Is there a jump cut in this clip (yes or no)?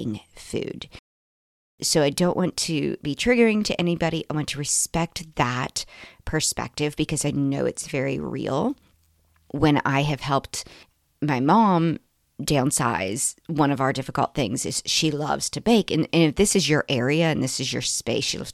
no